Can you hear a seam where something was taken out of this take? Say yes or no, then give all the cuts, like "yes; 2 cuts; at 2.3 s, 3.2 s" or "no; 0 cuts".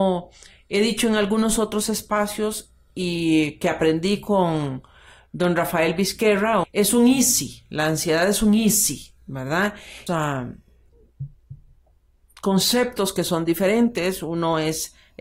yes; 2 cuts; at 6.6 s, 10.1 s